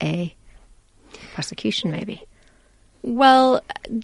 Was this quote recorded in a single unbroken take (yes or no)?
yes